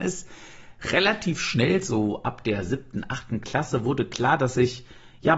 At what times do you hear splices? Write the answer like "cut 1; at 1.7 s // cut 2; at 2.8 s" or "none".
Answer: none